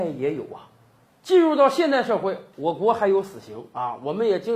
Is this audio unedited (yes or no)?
yes